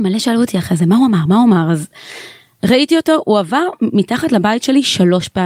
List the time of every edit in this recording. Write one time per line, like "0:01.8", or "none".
none